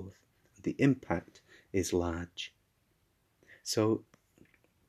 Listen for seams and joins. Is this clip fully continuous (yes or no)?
yes